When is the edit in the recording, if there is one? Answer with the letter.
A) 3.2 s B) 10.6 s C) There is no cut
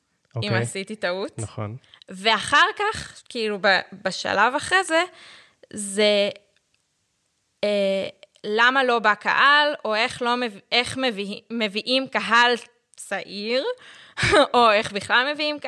C